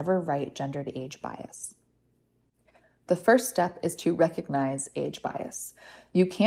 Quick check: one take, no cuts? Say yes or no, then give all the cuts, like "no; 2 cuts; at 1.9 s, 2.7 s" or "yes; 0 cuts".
yes; 0 cuts